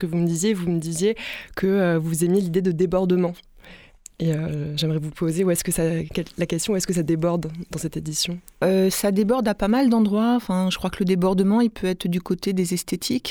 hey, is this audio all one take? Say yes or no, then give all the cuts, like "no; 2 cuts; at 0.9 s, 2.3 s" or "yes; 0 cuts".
yes; 0 cuts